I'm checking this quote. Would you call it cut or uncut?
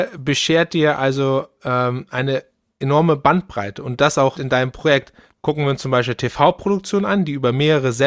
cut